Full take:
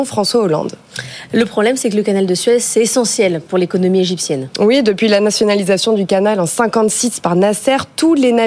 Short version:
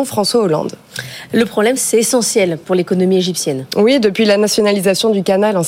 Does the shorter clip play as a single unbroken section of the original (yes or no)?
no